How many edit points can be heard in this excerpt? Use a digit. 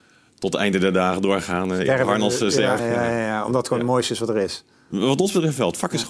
1